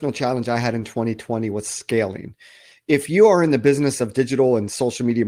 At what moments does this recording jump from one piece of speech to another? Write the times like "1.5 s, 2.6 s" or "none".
none